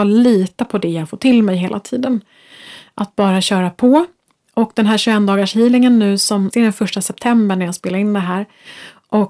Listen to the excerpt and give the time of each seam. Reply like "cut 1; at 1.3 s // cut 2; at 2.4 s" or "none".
cut 1; at 6.5 s